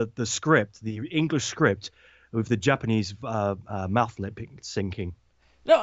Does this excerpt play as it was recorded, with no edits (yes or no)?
yes